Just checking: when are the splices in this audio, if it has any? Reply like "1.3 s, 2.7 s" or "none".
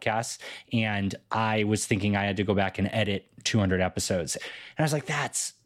4.4 s